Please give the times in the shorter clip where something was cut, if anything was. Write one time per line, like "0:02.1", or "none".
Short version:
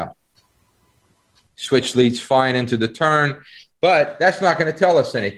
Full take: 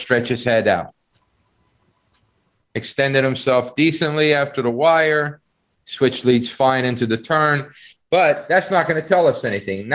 0:01.5